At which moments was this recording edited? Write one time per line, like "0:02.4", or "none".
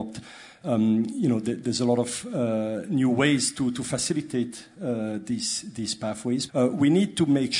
0:06.5